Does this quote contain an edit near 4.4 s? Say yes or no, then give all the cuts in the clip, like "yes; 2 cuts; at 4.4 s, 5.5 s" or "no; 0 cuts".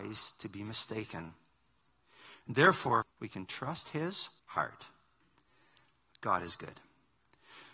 yes; 2 cuts; at 3.0 s, 4.4 s